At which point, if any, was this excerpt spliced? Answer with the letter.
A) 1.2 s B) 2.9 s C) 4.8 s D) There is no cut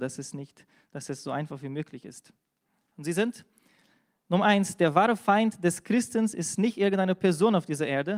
B